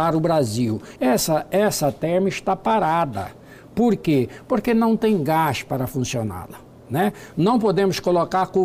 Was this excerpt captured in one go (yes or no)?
no